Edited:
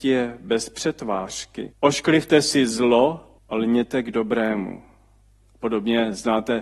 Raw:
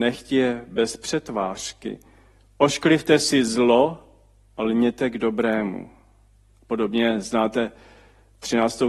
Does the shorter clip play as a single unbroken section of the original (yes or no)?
no